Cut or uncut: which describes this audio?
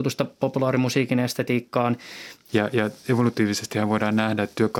cut